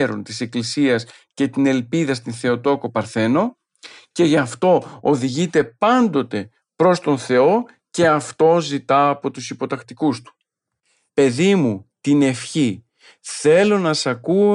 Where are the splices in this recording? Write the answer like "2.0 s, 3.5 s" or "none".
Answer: 11.1 s